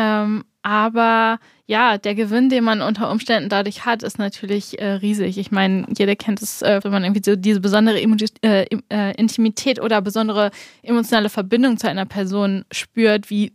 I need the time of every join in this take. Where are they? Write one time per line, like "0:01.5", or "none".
0:06.8